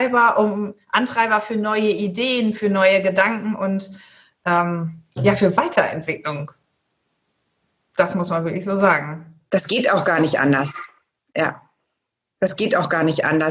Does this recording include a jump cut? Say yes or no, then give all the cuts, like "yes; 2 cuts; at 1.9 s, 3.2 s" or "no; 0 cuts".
no; 0 cuts